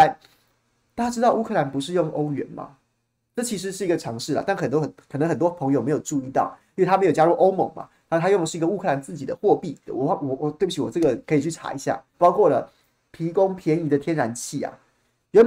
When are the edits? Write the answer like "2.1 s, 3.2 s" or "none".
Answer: 9.9 s, 12.1 s